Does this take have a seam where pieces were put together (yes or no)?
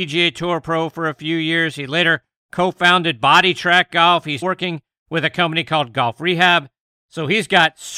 yes